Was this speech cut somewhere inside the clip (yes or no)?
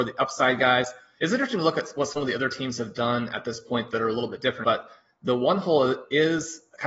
yes